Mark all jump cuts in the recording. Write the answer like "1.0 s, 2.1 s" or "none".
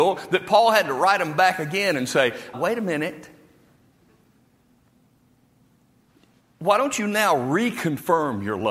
2.5 s